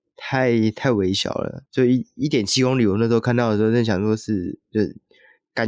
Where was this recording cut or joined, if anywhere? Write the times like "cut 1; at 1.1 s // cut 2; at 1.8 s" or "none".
cut 1; at 1.7 s